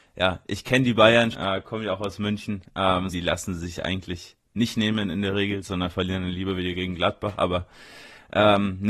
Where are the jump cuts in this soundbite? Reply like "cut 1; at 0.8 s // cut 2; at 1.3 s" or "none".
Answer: cut 1; at 1.3 s // cut 2; at 3.1 s